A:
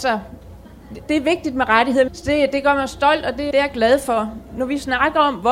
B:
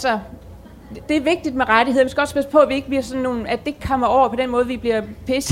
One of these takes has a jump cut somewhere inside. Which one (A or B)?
A